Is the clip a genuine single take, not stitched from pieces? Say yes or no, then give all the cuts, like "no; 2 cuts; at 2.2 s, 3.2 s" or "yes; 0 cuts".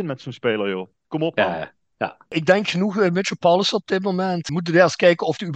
yes; 0 cuts